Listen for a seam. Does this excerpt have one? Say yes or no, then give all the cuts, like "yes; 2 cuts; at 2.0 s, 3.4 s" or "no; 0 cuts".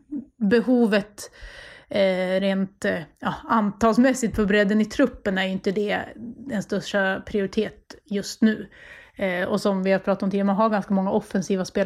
no; 0 cuts